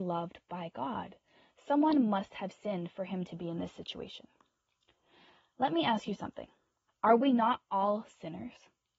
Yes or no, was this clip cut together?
yes